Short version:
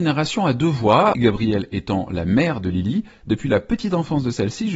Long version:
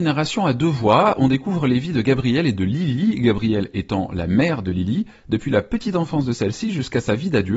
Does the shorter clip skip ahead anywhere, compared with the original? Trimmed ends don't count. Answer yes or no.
yes